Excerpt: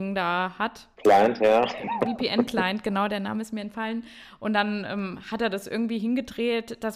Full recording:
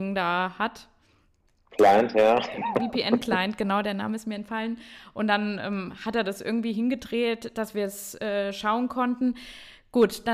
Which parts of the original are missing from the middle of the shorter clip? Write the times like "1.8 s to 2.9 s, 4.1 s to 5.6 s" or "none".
0.9 s to 1.7 s